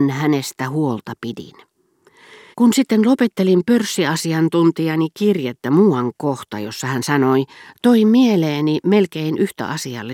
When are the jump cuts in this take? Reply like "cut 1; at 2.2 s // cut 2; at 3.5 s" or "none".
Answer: cut 1; at 2.5 s // cut 2; at 7.8 s